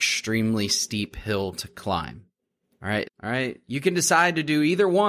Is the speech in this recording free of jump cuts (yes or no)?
no